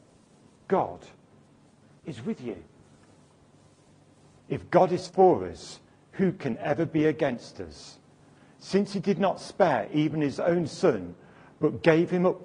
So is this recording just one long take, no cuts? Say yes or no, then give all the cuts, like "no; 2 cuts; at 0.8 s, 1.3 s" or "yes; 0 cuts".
no; 1 cut; at 4.4 s